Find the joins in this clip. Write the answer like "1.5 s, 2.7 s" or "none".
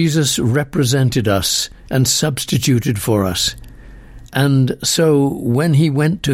none